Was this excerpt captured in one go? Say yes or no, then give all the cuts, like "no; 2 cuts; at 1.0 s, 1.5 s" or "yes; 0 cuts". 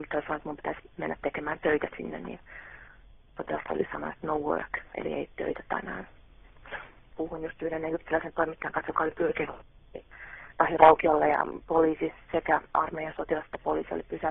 no; 1 cut; at 7.1 s